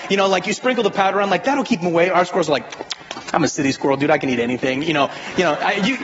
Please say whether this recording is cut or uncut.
uncut